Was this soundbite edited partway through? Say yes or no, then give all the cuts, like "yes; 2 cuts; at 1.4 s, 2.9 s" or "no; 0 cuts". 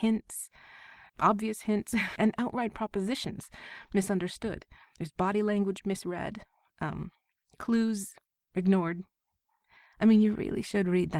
yes; 2 cuts; at 1.1 s, 2.2 s